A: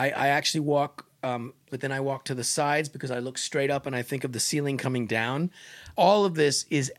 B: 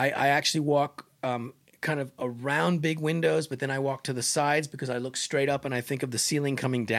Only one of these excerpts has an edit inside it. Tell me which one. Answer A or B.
A